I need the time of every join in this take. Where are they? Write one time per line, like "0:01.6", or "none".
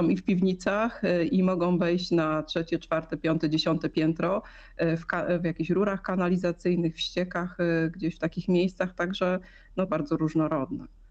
0:09.9